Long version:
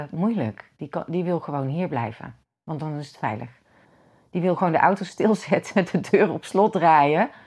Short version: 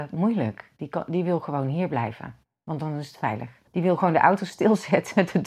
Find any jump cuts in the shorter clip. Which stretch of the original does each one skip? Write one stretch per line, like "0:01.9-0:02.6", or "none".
0:03.7-0:04.3